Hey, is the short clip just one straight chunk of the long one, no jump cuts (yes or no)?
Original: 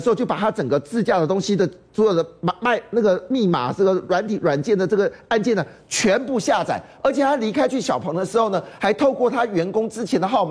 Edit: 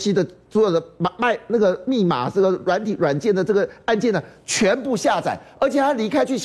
yes